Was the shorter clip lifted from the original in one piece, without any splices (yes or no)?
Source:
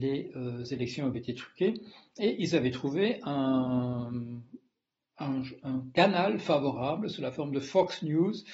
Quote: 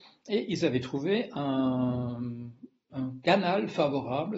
no